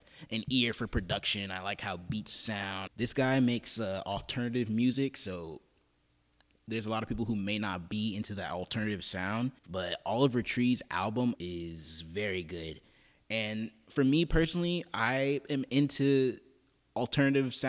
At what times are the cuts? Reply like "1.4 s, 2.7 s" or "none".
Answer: 2.9 s, 9.6 s, 11.4 s